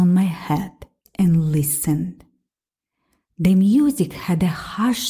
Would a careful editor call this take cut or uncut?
cut